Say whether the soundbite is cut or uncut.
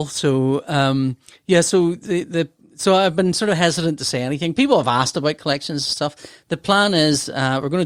uncut